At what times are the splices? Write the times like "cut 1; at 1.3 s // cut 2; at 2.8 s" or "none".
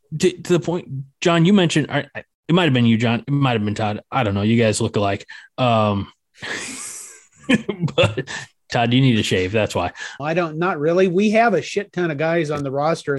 cut 1; at 10.2 s

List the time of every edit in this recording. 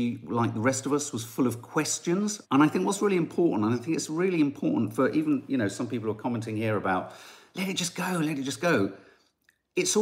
cut 1; at 2.4 s

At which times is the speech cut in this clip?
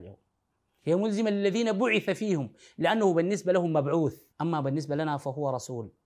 cut 1; at 4.3 s

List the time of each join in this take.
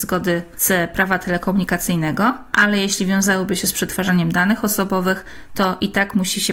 none

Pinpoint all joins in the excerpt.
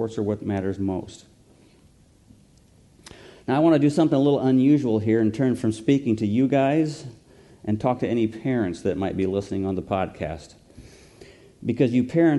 none

